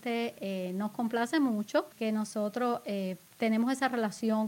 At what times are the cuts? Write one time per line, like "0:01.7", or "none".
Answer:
0:01.9